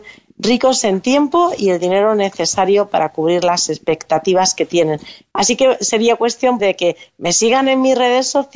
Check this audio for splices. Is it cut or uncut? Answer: cut